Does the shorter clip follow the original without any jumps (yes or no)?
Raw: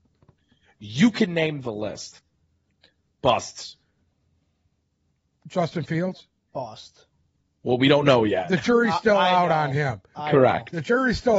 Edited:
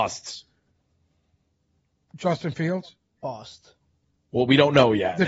yes